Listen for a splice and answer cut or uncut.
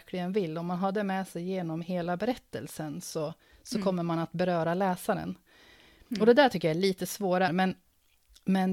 cut